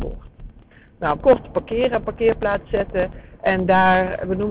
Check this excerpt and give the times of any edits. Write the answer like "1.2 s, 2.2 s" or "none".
1.2 s, 3.3 s